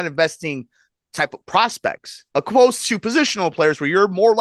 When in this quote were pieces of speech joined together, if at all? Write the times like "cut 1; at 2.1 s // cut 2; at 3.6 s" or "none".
cut 1; at 2.3 s

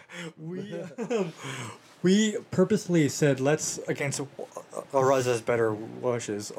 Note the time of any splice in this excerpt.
none

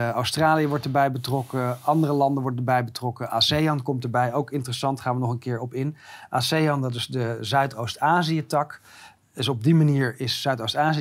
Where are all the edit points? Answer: none

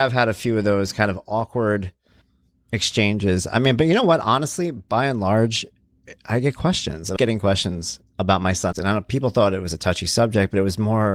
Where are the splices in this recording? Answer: cut 1; at 7.2 s // cut 2; at 8.7 s

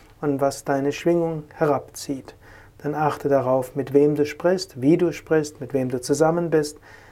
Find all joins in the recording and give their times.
none

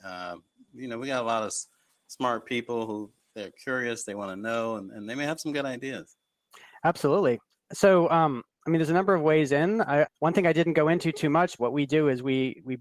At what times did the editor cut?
cut 1; at 10.0 s // cut 2; at 11.6 s

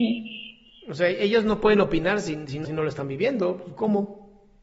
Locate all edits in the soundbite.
cut 1; at 2.6 s

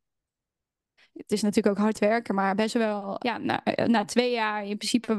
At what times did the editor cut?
cut 1; at 1.0 s // cut 2; at 3.2 s

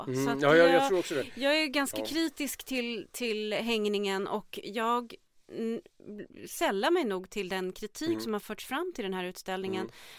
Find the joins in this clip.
none

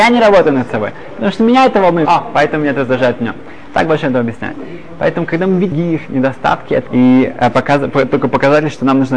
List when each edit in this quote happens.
cut 1; at 2.0 s // cut 2; at 6.9 s

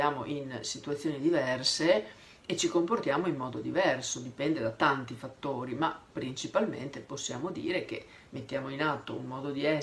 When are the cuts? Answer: none

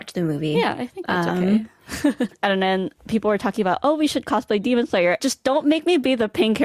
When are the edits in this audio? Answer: cut 1; at 2.3 s // cut 2; at 5.2 s

